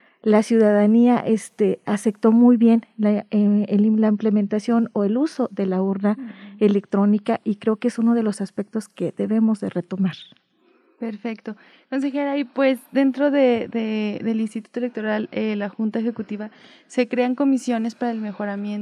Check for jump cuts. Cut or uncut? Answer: uncut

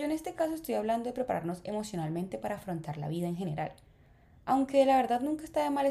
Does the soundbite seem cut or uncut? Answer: uncut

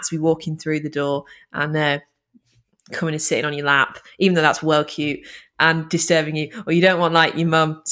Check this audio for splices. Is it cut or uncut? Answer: uncut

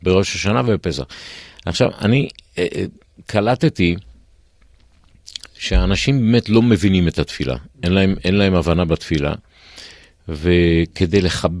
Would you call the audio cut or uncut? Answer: uncut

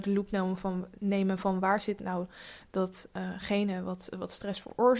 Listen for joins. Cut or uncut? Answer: uncut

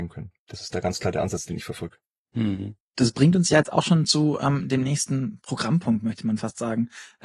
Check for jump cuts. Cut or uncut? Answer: uncut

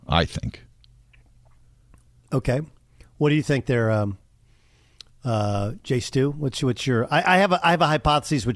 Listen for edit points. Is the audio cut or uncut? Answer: uncut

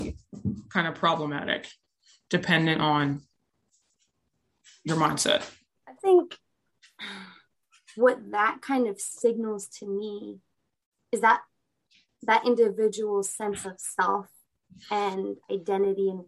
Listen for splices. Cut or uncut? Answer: cut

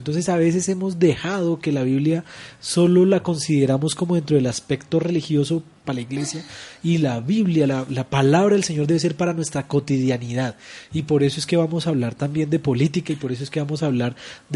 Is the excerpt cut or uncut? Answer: cut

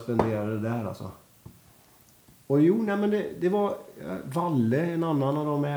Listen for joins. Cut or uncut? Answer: uncut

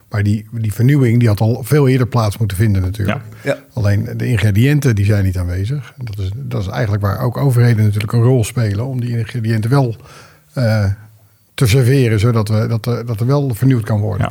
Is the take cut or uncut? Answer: uncut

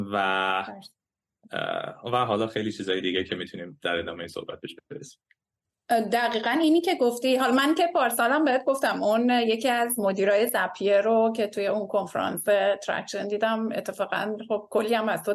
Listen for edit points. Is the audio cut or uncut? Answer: uncut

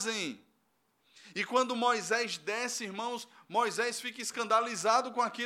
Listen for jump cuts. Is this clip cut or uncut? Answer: uncut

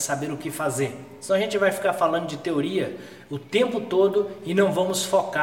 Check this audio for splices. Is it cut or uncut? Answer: uncut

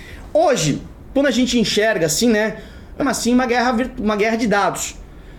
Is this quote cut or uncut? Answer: cut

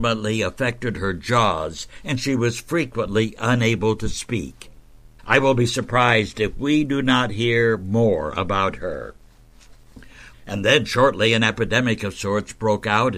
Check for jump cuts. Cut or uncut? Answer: cut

